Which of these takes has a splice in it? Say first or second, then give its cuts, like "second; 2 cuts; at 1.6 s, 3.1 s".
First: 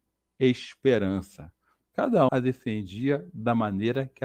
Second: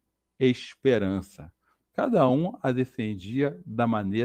first; 1 cut; at 2.3 s